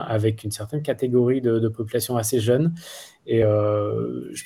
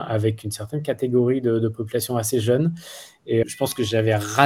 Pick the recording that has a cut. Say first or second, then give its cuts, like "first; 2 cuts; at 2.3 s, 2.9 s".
second; 1 cut; at 3.4 s